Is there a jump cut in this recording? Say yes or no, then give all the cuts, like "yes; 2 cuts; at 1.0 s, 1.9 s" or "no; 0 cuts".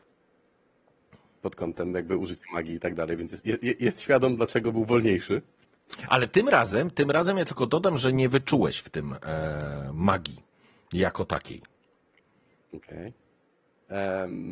no; 0 cuts